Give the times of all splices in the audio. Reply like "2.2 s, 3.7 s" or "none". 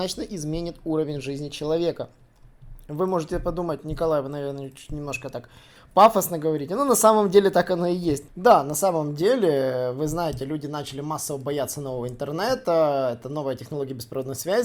8.3 s